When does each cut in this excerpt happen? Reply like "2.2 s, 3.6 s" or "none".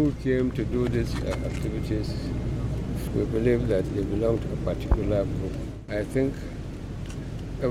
3.1 s, 5.9 s